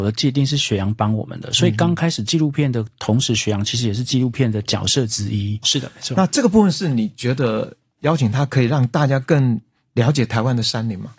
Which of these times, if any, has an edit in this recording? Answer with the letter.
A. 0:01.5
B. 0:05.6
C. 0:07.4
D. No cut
B